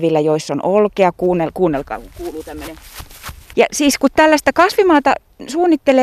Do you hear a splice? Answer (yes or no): yes